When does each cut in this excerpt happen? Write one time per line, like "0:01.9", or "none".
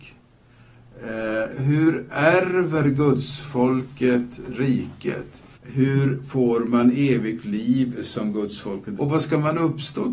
0:01.5
0:05.5
0:09.0

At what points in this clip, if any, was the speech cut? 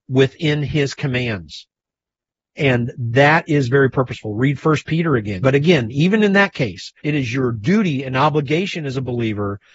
0:05.4
0:07.0

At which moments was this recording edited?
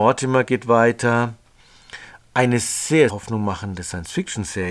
0:03.1

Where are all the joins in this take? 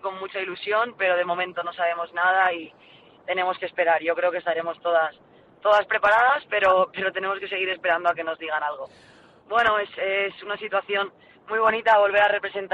0:09.4

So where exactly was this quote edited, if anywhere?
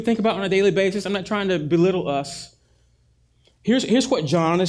none

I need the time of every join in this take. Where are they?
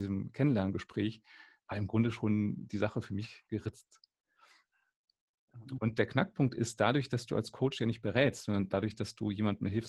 0:05.8

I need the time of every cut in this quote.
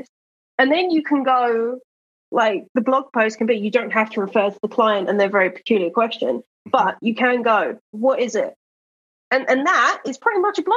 0:07.9

